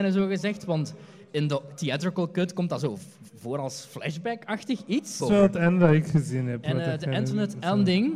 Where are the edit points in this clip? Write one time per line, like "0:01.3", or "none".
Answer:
0:05.2